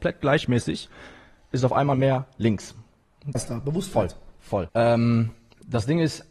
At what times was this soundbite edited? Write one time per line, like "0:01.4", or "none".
0:03.3
0:04.7